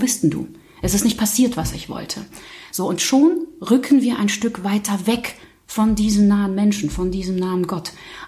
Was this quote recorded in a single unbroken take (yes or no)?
yes